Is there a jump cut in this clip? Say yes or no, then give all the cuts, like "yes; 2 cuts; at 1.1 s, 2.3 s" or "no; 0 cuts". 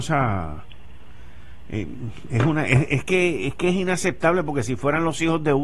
no; 0 cuts